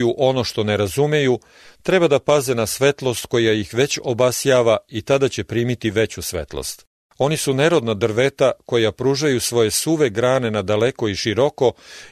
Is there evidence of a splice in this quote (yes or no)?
yes